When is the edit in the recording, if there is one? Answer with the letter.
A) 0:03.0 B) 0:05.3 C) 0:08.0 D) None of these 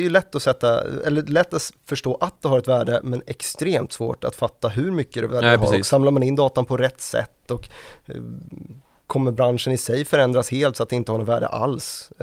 B